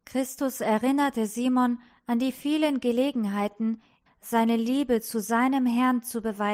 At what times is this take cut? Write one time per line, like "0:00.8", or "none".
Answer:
0:04.1

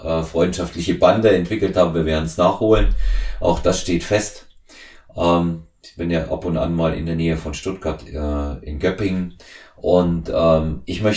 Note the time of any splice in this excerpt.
none

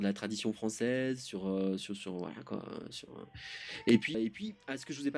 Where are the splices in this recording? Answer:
0:04.1

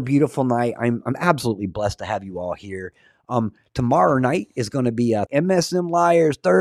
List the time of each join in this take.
0:05.3

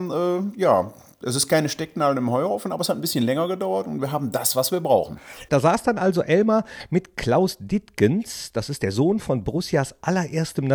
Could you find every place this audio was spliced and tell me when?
0:05.5

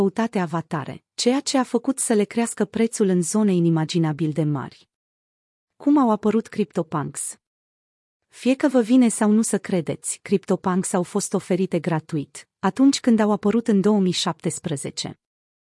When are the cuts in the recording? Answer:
none

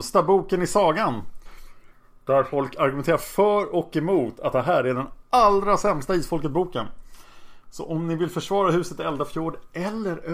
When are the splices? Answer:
none

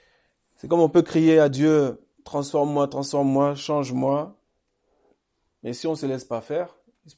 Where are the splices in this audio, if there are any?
none

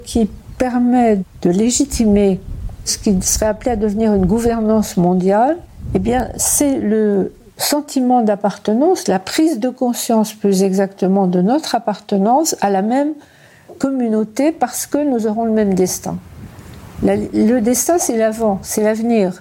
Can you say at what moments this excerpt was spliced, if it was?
none

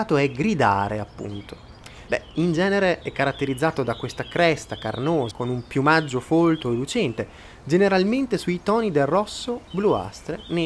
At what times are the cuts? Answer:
0:02.1
0:05.3
0:09.7

